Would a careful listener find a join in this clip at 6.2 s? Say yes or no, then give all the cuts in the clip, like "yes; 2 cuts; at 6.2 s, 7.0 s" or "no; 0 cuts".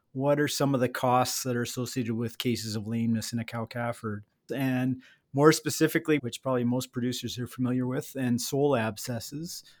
yes; 2 cuts; at 4.5 s, 6.2 s